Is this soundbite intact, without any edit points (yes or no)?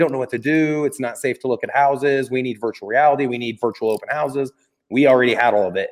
yes